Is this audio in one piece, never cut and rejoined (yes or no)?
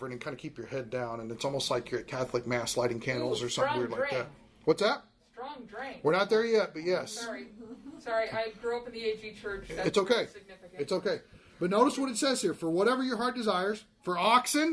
yes